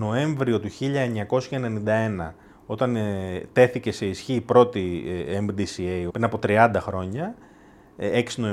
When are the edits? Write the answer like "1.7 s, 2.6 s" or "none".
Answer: 6.1 s